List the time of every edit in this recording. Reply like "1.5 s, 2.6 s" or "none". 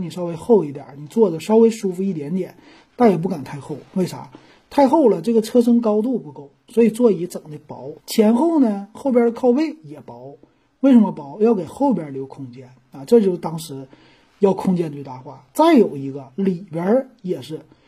8.0 s